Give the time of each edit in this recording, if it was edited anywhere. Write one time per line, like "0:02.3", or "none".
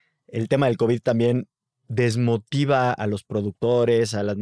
none